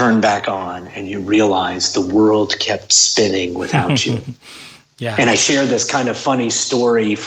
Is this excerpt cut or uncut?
uncut